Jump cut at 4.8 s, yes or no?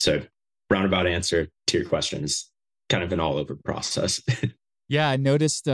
no